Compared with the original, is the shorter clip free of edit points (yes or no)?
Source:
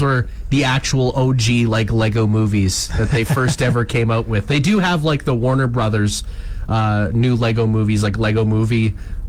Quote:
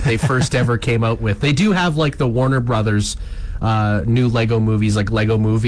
yes